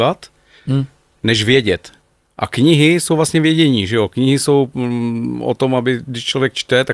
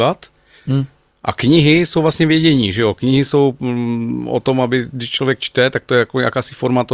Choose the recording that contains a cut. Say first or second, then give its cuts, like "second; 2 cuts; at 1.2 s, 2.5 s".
second; 1 cut; at 1.1 s